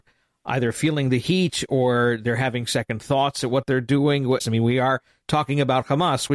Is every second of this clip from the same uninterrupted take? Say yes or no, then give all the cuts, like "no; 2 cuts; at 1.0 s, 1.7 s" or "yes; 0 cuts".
no; 1 cut; at 4.4 s